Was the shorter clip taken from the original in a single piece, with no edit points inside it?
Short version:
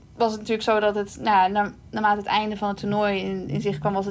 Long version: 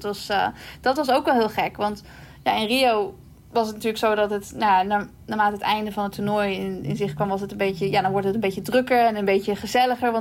yes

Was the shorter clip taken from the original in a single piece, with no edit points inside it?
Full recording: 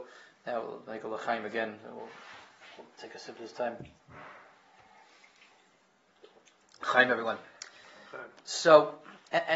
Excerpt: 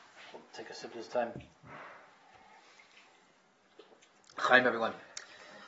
yes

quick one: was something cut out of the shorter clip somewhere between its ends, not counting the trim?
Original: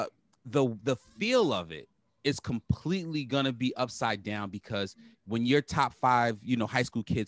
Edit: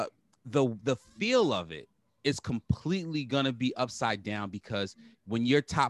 no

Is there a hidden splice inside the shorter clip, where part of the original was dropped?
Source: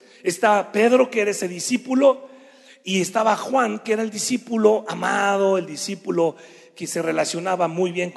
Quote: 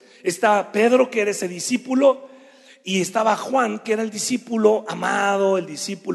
no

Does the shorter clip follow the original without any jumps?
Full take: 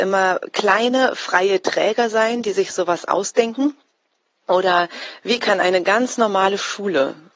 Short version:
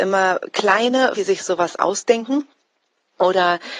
no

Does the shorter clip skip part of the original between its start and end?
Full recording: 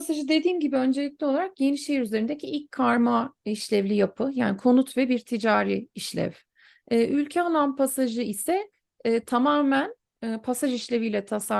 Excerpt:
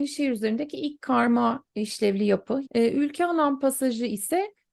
yes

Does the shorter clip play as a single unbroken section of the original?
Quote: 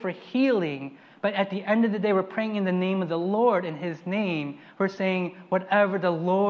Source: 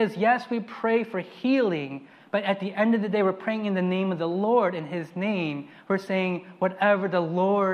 yes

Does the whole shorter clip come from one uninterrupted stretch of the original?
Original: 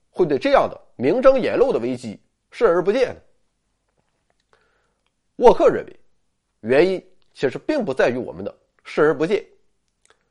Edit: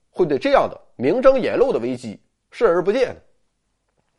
yes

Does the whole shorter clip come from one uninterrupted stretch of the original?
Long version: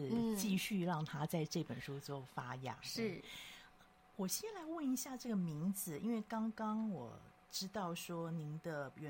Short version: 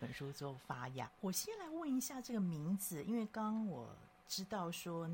no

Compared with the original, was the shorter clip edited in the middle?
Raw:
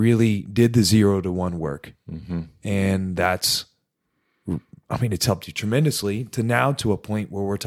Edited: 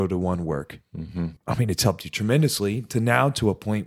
yes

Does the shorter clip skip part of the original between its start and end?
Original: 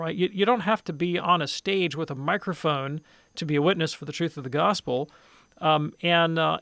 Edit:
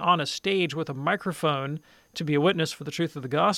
no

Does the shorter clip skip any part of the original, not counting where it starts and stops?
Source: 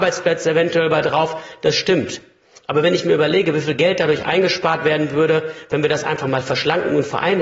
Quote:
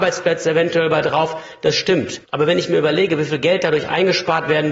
yes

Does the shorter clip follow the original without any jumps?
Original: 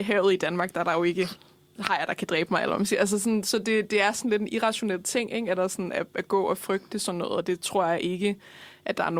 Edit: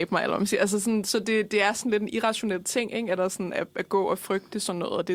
yes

